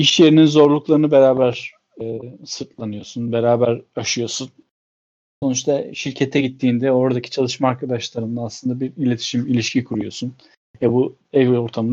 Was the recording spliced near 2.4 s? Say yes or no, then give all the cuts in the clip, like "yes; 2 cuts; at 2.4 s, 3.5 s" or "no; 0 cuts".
no; 1 cut; at 5.4 s